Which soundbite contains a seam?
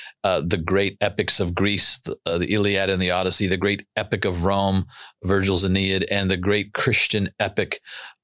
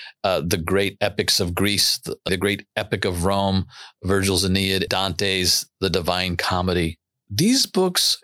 second; 2 cuts; at 2.3 s, 4.9 s

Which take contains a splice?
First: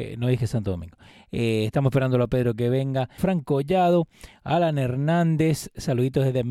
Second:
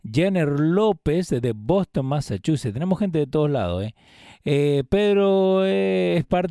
first; 2 cuts; at 1.1 s, 3.2 s

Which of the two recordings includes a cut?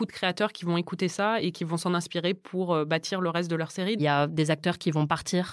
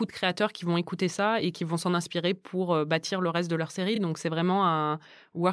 first; 1 cut; at 4.0 s

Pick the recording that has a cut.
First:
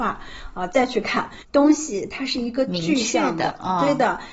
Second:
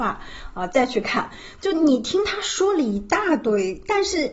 first; 1 cut; at 1.4 s

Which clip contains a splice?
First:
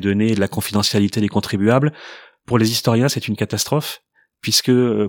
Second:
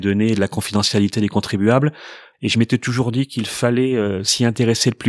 second; 1 cut; at 2.3 s

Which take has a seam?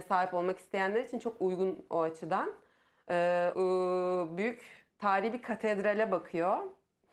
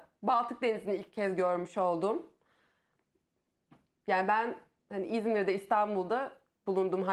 first; 2 cuts; at 3.5 s, 4.9 s

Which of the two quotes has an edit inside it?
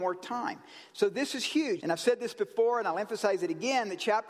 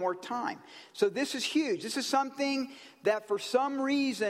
first; 1 cut; at 1.8 s

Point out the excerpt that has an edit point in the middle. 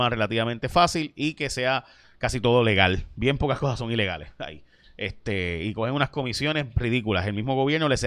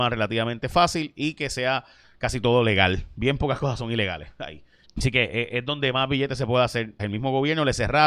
second; 2 cuts; at 4.8 s, 7.0 s

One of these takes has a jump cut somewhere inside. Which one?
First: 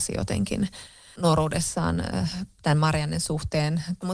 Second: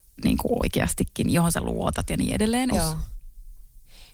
second; 1 cut; at 2.7 s

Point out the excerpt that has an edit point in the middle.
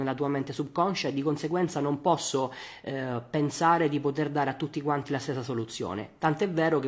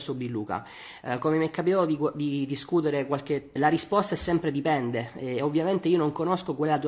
second; 2 cuts; at 1.0 s, 3.6 s

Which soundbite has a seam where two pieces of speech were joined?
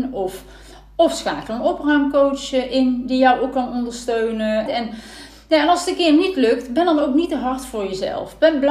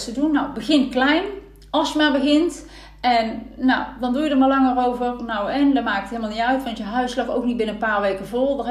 first; 1 cut; at 4.7 s

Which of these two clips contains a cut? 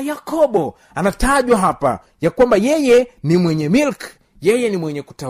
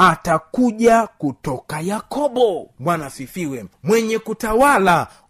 second; 1 cut; at 3.7 s

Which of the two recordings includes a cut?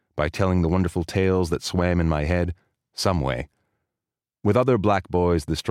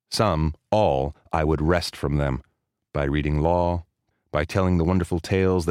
second; 2 cuts; at 2.8 s, 4.1 s

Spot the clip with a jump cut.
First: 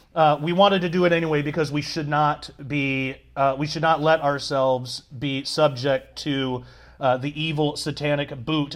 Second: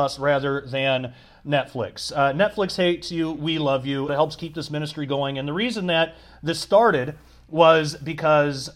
second; 1 cut; at 4.1 s

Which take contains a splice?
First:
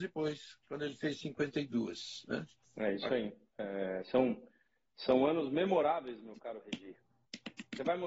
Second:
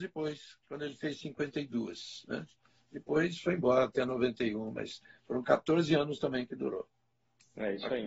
first; 1 cut; at 2.6 s

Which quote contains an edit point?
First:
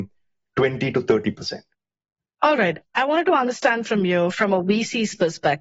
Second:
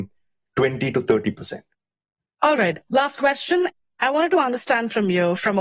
first; 1 cut; at 2.8 s

